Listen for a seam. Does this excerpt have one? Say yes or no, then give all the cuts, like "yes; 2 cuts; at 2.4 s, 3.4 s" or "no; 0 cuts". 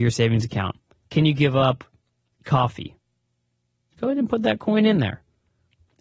yes; 2 cuts; at 1.0 s, 3.9 s